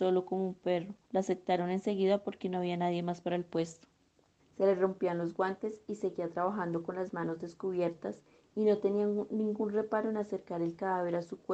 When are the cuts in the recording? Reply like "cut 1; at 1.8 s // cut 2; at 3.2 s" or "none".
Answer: cut 1; at 1.0 s // cut 2; at 4.4 s